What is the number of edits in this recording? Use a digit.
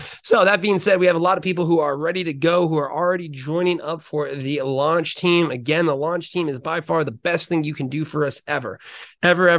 0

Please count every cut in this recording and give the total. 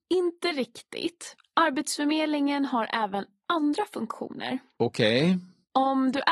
0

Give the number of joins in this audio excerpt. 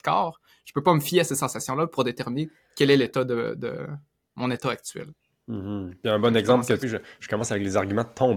1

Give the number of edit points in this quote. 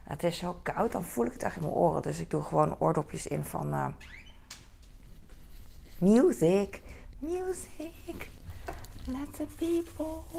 0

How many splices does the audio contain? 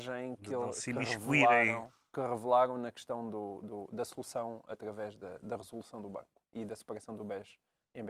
0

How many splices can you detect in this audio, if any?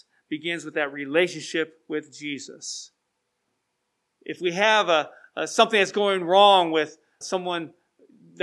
1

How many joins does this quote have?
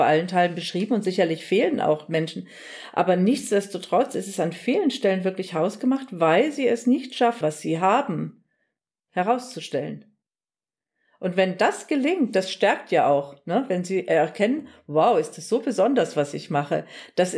1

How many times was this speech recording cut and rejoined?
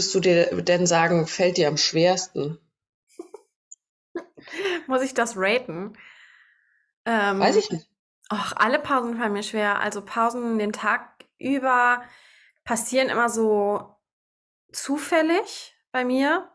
0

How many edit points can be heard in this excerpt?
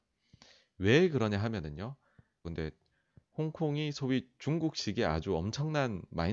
1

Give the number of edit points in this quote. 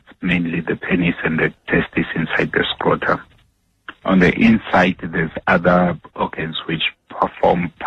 0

